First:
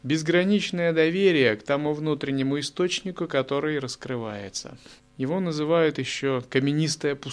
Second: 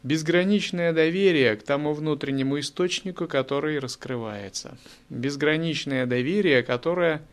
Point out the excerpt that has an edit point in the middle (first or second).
first